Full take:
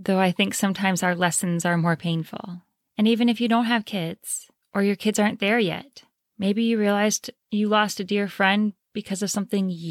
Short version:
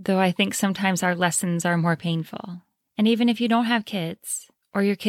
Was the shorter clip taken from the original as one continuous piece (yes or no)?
yes